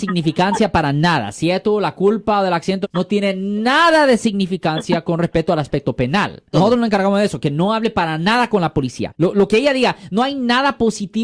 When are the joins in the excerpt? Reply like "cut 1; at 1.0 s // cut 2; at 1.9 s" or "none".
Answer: cut 1; at 2.8 s // cut 2; at 6.5 s // cut 3; at 9.1 s